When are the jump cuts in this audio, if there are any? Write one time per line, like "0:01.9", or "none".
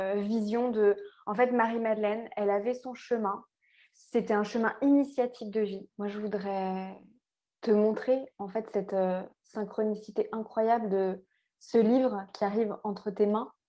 0:05.9